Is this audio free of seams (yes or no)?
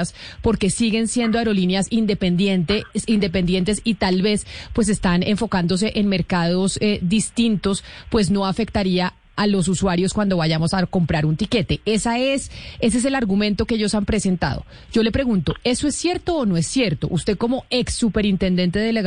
yes